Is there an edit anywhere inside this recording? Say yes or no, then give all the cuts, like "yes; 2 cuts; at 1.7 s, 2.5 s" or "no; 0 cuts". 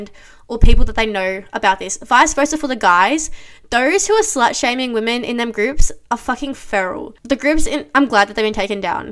no; 0 cuts